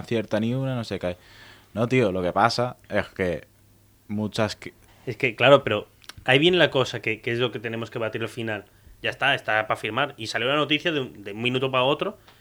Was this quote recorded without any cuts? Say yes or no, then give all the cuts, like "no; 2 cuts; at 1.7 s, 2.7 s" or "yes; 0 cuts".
no; 2 cuts; at 4.9 s, 9.0 s